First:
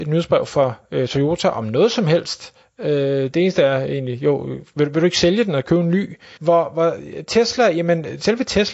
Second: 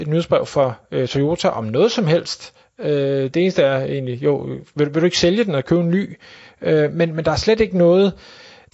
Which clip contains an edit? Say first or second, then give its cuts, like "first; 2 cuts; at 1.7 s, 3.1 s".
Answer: first; 1 cut; at 6.4 s